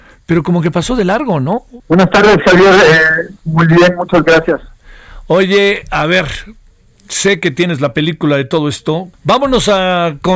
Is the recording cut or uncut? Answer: cut